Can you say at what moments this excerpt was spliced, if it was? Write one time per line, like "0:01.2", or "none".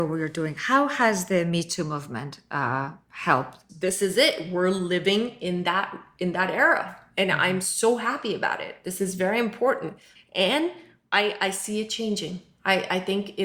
0:03.7
0:10.1

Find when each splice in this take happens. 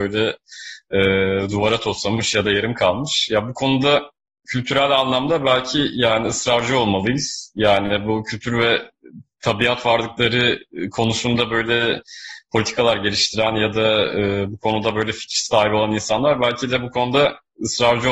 none

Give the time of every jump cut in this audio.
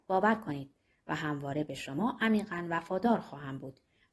none

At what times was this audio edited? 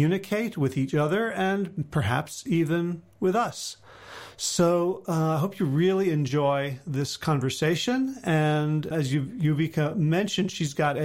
0:08.9

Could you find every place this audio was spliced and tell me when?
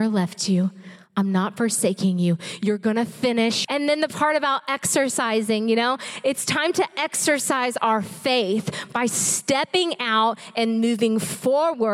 0:03.6

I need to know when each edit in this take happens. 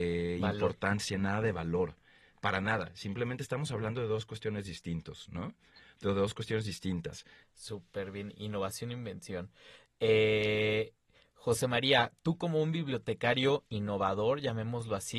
0:07.4

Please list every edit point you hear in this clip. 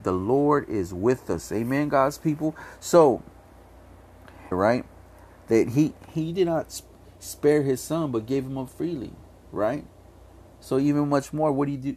0:04.5

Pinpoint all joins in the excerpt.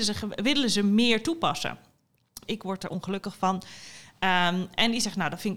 0:02.4

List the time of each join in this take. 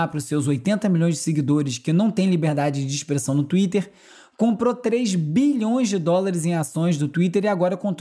none

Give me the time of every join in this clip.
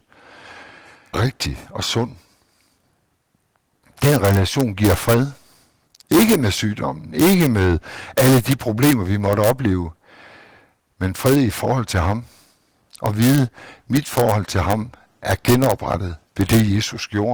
0:01.1

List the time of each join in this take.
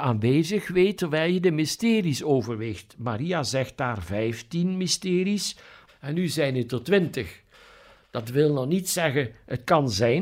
0:05.9

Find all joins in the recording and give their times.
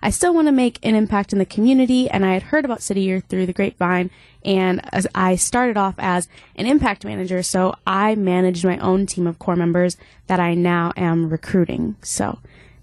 none

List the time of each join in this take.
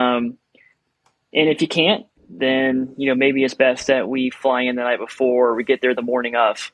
0:02.2

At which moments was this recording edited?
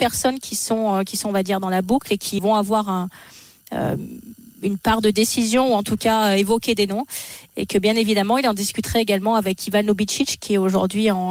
0:02.4
0:07.5

